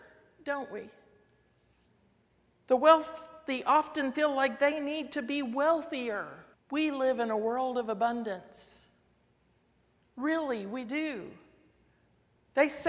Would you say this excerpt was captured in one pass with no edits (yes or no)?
no